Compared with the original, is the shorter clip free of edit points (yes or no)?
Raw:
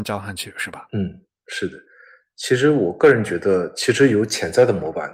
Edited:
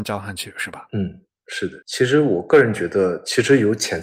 no